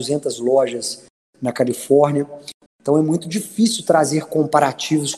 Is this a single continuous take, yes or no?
no